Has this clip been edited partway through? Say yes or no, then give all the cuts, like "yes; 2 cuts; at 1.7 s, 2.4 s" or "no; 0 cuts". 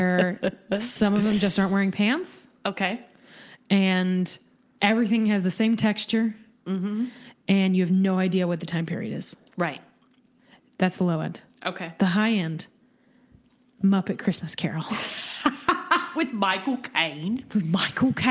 no; 0 cuts